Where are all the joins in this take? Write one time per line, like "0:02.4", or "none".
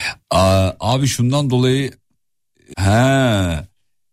0:02.7